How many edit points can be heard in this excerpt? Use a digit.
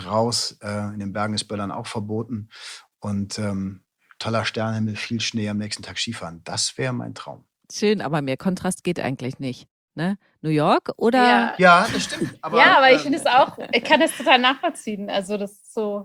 0